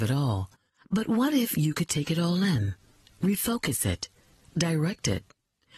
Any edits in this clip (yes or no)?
yes